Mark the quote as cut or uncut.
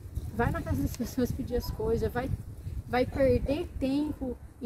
uncut